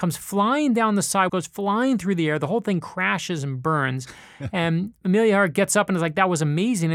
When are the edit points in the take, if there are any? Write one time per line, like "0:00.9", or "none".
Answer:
0:01.3

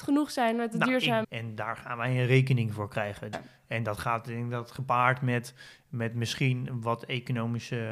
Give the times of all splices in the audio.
0:01.2
0:03.3

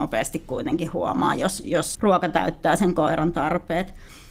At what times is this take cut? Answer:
0:01.9

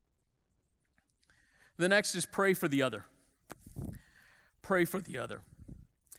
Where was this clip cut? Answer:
none

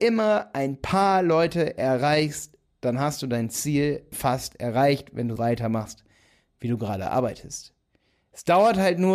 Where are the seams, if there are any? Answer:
0:04.1
0:05.4

